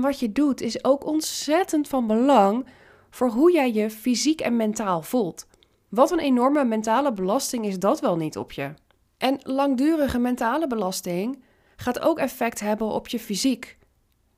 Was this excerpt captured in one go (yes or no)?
no